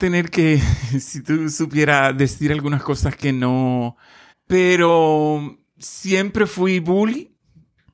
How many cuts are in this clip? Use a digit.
1